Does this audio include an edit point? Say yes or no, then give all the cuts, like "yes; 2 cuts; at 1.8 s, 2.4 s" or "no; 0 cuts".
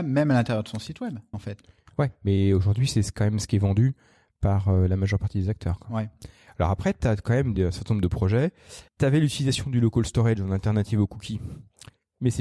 yes; 2 cuts; at 1.3 s, 8.9 s